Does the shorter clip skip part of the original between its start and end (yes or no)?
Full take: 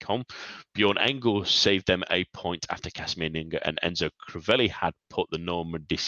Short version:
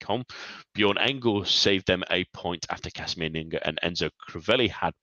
no